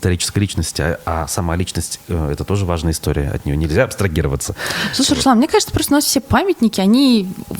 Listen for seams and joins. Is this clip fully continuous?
yes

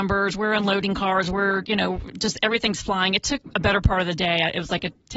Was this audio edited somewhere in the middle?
no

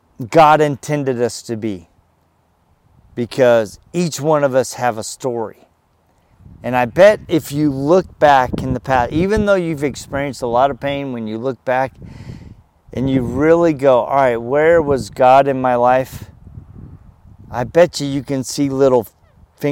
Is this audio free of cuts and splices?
yes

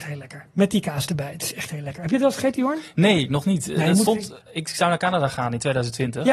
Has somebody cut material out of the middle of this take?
no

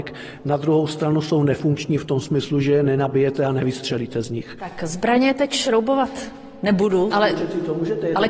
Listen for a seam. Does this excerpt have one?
yes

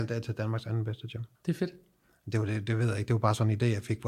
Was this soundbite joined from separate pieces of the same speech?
yes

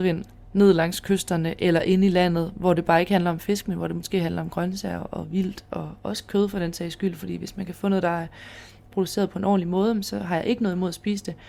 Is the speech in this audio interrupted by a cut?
no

